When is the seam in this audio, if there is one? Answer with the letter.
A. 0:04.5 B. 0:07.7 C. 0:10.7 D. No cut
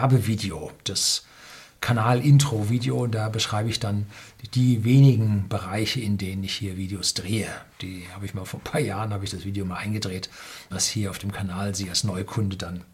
C